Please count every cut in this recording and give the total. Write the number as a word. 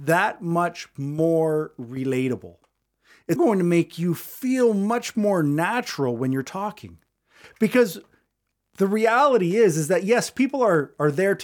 one